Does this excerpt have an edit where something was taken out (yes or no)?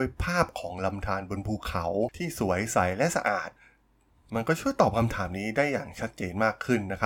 no